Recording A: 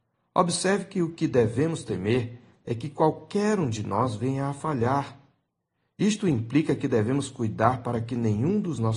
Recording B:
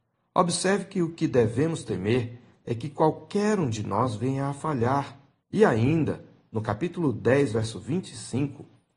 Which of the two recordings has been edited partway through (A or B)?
B